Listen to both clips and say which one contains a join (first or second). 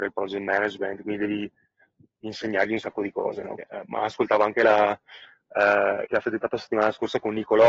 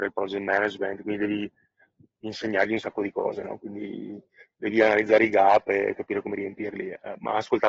first